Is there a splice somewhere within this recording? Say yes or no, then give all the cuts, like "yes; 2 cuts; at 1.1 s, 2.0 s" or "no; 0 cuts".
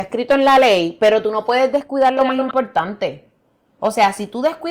no; 0 cuts